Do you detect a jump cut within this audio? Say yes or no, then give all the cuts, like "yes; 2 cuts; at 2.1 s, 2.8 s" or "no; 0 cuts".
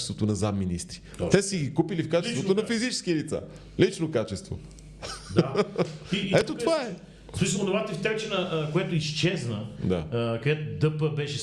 no; 0 cuts